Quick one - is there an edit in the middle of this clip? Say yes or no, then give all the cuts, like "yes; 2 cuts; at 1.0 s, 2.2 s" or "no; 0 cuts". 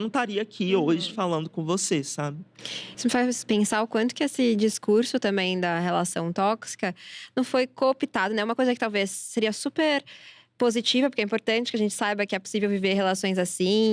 no; 0 cuts